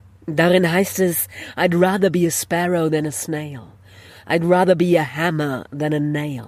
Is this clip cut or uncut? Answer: uncut